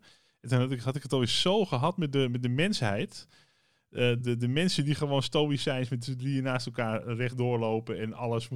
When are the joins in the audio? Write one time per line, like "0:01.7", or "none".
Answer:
0:04.2